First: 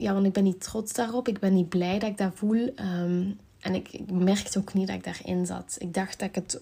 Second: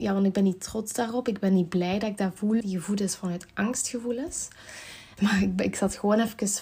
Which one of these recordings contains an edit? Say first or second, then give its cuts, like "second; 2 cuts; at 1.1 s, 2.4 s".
second; 2 cuts; at 2.6 s, 5.2 s